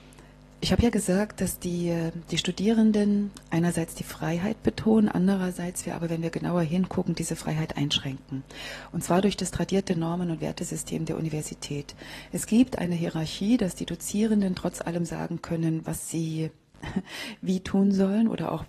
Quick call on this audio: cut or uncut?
uncut